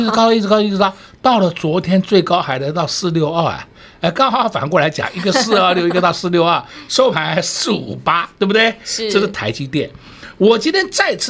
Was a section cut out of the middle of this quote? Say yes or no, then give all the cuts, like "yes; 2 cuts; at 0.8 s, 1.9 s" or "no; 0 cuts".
no; 0 cuts